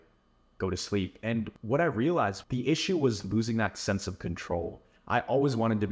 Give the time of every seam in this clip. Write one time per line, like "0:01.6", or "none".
none